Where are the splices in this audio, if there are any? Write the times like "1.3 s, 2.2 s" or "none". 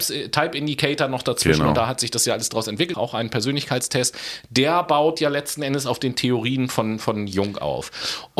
2.9 s